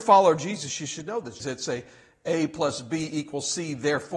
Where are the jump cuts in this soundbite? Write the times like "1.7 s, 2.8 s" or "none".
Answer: 1.4 s